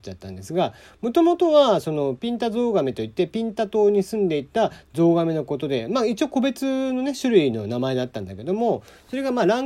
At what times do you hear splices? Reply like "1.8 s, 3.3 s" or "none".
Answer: none